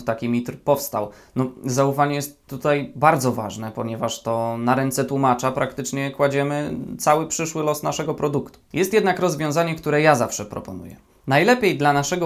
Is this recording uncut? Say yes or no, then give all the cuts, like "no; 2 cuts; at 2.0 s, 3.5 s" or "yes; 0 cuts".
yes; 0 cuts